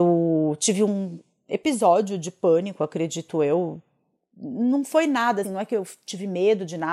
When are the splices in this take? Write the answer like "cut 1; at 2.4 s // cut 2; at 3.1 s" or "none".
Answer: cut 1; at 5.4 s